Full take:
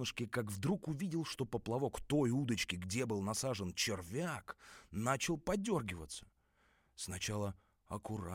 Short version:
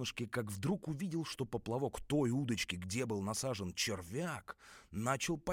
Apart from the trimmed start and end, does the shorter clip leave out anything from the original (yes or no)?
no